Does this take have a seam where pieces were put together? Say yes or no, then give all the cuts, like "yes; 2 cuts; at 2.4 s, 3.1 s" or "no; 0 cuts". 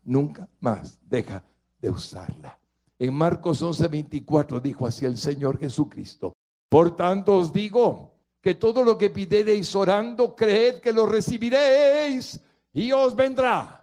no; 0 cuts